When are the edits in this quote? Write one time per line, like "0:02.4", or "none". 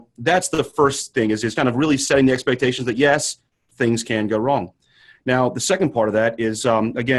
0:01.6